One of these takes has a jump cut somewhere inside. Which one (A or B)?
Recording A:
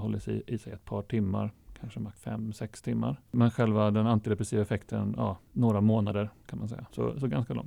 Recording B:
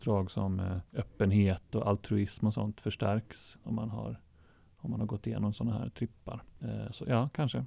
A